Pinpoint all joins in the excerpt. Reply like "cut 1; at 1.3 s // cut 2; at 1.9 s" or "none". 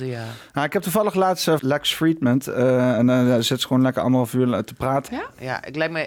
cut 1; at 1.6 s // cut 2; at 5.1 s